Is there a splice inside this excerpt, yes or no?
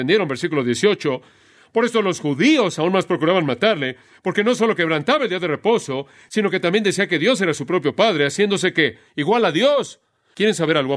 no